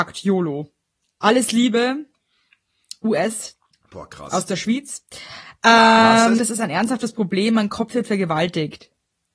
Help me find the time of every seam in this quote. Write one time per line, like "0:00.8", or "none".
0:01.0
0:06.4